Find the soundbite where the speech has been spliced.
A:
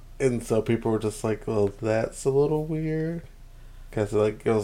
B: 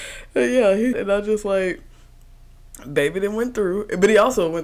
B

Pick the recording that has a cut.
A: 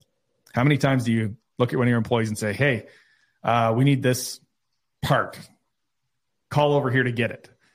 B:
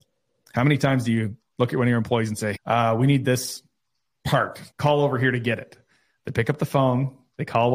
B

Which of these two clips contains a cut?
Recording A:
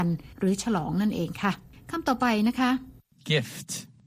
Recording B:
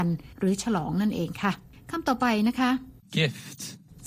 B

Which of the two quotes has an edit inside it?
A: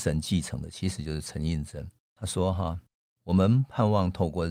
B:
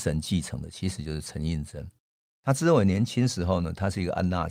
A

